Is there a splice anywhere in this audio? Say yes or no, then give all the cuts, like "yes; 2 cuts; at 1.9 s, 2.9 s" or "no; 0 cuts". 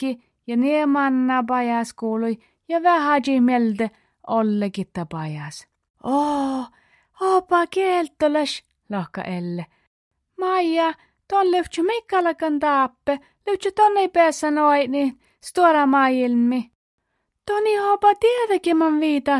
yes; 1 cut; at 5.9 s